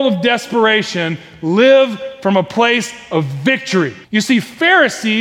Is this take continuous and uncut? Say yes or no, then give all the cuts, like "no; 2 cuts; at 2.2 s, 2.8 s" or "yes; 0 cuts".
no; 1 cut; at 4.0 s